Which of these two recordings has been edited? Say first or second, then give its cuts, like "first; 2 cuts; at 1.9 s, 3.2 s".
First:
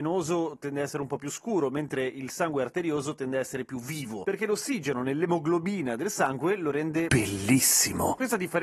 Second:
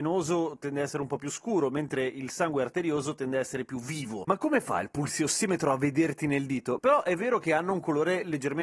second; 2 cuts; at 4.2 s, 6.8 s